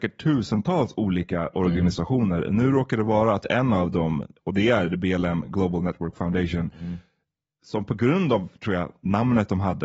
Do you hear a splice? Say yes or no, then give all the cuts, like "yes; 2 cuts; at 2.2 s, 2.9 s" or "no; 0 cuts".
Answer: no; 0 cuts